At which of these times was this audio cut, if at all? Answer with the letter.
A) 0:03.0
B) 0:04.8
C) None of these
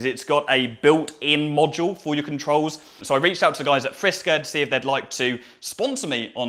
A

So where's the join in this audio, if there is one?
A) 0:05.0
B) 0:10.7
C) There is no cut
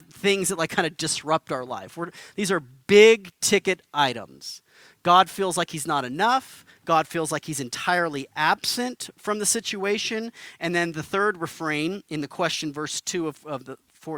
C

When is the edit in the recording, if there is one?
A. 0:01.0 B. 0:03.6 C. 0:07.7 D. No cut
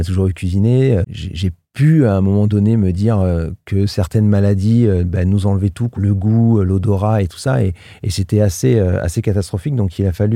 A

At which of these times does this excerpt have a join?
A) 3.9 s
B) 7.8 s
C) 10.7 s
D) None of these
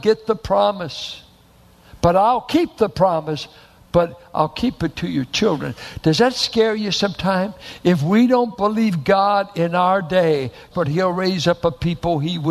C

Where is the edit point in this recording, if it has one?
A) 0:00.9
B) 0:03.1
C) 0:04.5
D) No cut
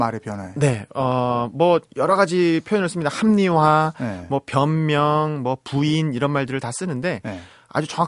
D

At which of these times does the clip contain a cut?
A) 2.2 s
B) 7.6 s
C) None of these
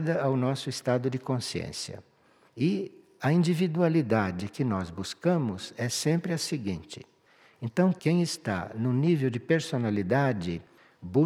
C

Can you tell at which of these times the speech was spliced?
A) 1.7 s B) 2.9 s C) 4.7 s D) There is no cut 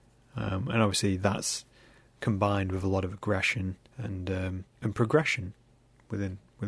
C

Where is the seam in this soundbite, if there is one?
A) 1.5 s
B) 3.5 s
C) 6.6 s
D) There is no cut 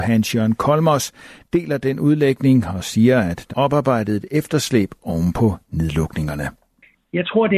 B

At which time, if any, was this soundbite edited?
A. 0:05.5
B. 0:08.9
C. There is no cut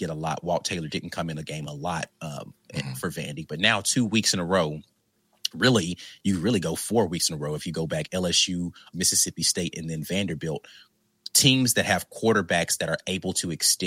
B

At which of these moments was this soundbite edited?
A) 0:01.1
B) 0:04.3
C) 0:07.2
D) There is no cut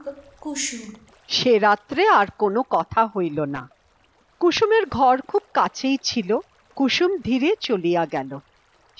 C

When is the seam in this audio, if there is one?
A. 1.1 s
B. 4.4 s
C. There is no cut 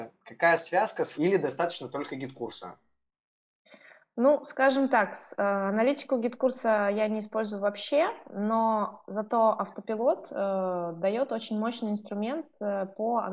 A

